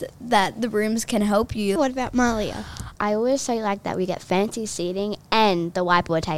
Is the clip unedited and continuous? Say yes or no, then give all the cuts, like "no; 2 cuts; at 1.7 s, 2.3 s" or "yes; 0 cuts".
no; 2 cuts; at 1.8 s, 3.0 s